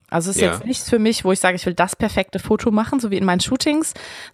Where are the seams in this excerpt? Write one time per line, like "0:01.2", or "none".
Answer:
none